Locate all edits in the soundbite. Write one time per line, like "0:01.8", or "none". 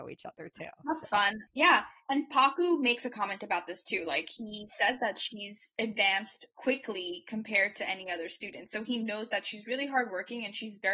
0:01.5